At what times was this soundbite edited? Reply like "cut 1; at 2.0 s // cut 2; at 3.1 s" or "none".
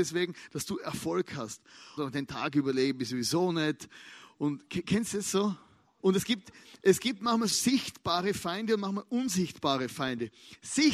cut 1; at 2.0 s // cut 2; at 6.0 s // cut 3; at 7.5 s